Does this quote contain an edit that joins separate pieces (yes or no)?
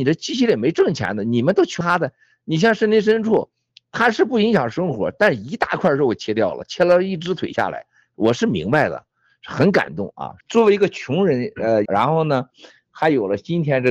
yes